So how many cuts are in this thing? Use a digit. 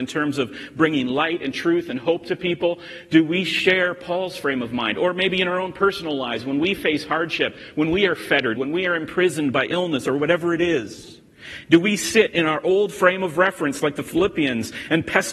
1